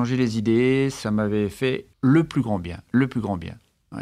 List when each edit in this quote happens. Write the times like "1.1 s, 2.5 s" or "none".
1.9 s